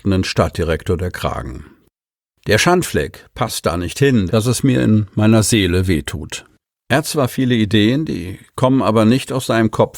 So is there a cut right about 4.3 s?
yes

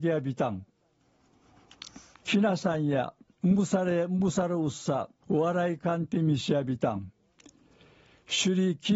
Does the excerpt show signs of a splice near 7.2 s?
no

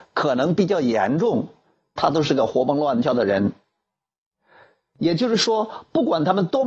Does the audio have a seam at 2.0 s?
yes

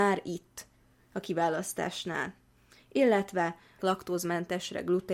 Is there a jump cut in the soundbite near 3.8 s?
yes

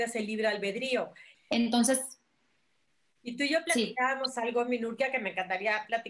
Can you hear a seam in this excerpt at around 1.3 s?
yes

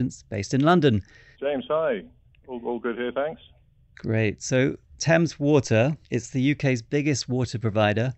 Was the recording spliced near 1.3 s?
yes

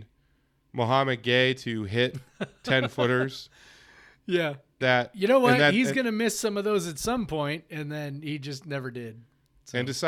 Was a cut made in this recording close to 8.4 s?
no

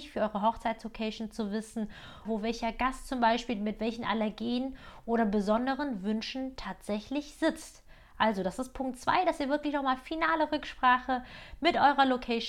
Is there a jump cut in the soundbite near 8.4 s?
no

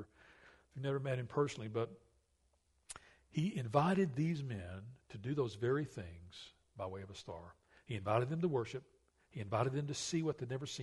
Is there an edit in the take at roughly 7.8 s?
no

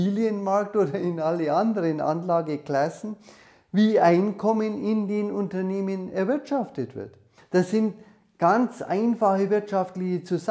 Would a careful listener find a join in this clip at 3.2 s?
no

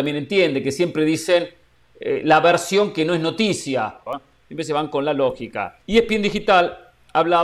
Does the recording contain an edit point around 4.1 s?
yes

